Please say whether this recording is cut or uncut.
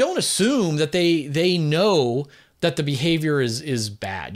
uncut